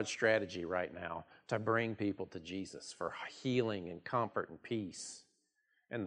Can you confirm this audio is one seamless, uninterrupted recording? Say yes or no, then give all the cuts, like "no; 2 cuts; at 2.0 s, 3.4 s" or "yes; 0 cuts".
yes; 0 cuts